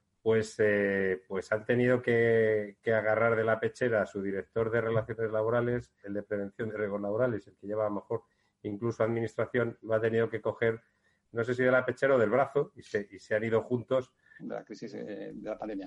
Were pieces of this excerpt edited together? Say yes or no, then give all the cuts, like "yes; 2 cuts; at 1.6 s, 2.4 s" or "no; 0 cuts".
yes; 2 cuts; at 6.0 s, 14.4 s